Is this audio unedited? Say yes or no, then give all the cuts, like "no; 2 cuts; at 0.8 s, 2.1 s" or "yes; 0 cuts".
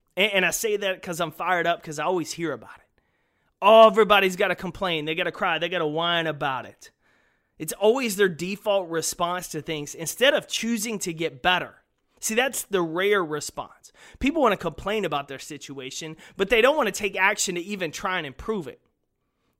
yes; 0 cuts